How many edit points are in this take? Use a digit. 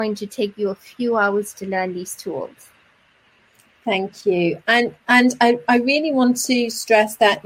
0